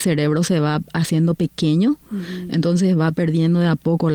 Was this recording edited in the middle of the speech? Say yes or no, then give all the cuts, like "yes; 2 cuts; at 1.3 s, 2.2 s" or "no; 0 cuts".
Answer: no; 0 cuts